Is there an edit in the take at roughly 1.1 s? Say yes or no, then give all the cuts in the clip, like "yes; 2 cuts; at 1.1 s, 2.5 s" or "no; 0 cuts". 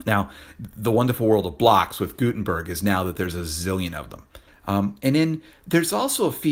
no; 1 cut; at 4.5 s